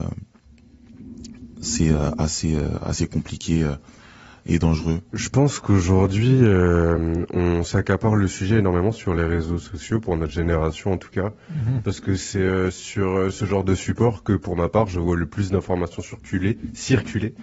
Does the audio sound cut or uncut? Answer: cut